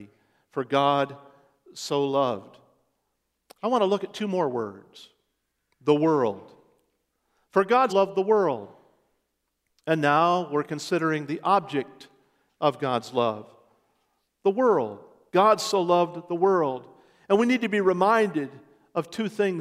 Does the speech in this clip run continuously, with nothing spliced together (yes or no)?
no